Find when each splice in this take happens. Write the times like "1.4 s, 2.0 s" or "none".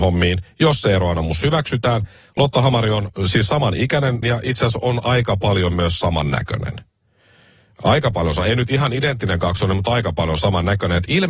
4.2 s